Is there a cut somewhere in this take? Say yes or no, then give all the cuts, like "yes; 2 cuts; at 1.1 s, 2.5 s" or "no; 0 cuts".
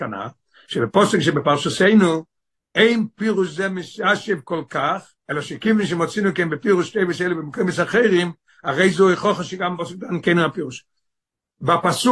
yes; 1 cut; at 5.2 s